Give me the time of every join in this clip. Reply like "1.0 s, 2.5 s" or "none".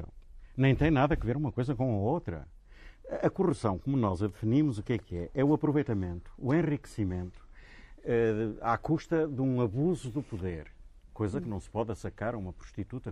none